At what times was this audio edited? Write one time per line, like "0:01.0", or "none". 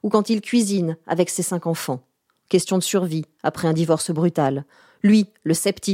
none